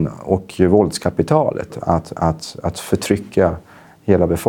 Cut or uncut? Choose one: cut